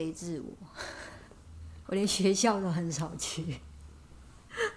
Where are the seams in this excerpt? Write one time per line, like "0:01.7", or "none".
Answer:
0:01.8